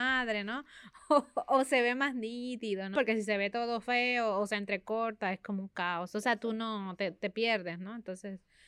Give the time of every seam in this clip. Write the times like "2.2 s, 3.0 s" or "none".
2.9 s